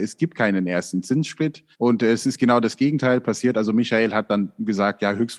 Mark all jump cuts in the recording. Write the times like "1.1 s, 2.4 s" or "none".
1.7 s